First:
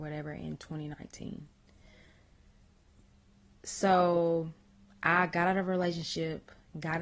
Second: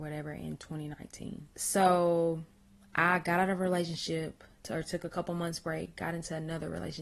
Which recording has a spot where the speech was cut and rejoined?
second; 2 cuts; at 1.5 s, 4.6 s

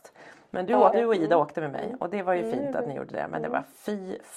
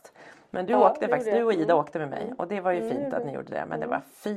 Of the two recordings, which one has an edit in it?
first; 1 cut; at 0.9 s

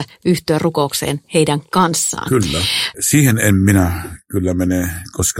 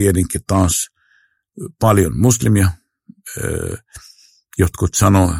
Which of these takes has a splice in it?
first; 1 cut; at 2.9 s

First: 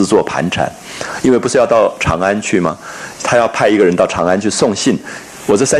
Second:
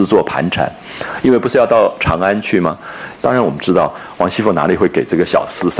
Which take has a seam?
second; 1 cut; at 3.1 s

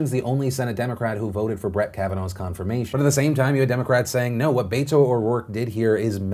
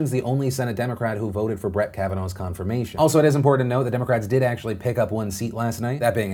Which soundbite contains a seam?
first; 1 cut; at 2.9 s

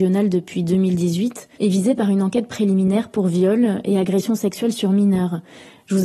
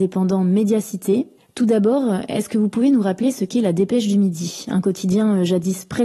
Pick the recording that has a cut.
first; 1 cut; at 1.5 s

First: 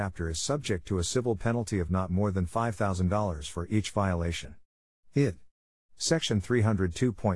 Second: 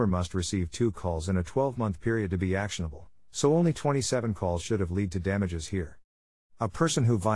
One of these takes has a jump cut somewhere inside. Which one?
second; 1 cut; at 6.4 s

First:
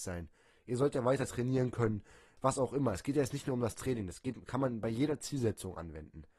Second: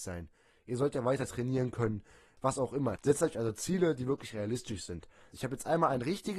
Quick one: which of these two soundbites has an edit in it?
second; 2 cuts; at 3.0 s, 5.3 s

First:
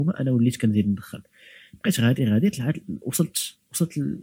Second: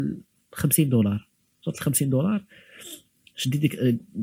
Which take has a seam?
first; 1 cut; at 2.2 s

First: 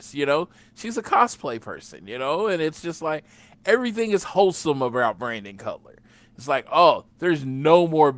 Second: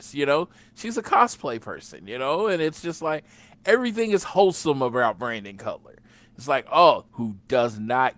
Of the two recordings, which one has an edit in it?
second; 1 cut; at 7.1 s

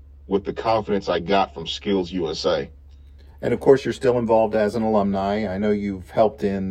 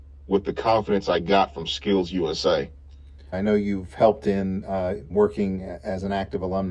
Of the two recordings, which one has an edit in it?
second; 2 cuts; at 3.3 s, 5.1 s

